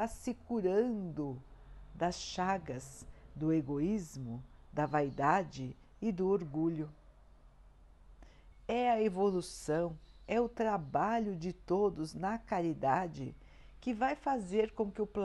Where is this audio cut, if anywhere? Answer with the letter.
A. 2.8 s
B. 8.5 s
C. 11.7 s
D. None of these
B